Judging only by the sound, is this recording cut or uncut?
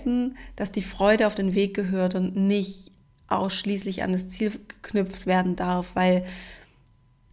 uncut